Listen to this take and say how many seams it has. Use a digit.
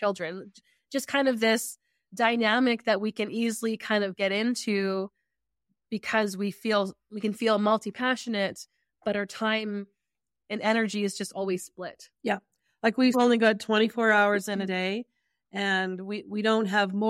1